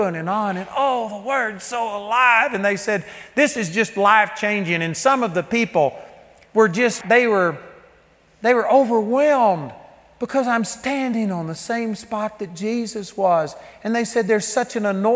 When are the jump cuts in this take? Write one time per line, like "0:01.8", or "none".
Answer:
0:07.0

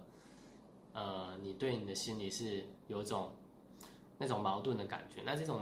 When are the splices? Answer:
none

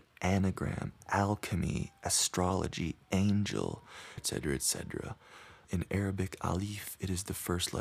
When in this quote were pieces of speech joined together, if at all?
0:04.2
0:05.6

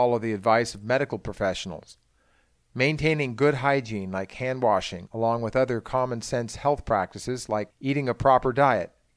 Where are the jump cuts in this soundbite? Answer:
none

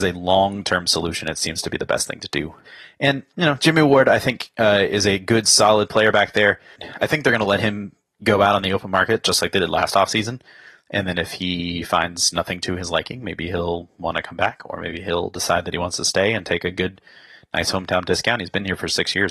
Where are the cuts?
none

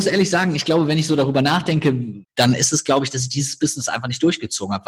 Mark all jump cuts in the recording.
0:02.2

